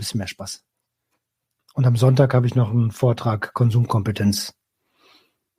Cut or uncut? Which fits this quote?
uncut